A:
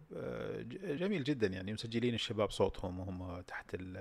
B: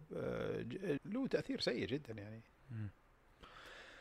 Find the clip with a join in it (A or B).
B